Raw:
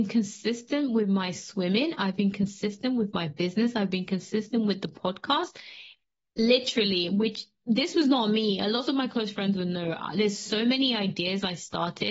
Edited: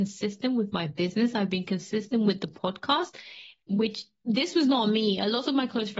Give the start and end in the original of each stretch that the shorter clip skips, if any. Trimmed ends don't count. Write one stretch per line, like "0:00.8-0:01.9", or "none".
0:06.1-0:07.1